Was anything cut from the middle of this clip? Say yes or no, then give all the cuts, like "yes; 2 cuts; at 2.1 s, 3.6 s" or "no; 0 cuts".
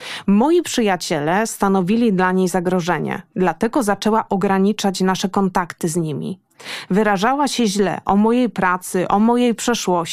no; 0 cuts